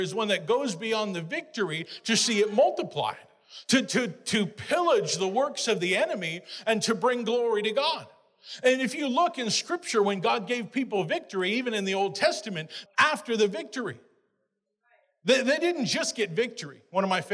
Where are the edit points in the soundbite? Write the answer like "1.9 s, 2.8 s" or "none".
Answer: 12.9 s